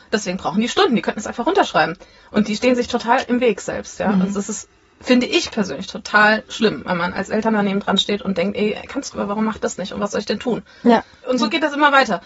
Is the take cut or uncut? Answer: cut